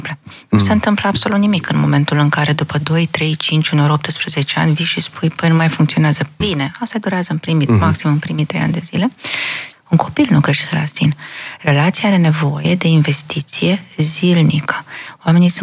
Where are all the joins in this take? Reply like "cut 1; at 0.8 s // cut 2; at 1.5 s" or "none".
cut 1; at 6.4 s // cut 2; at 9.7 s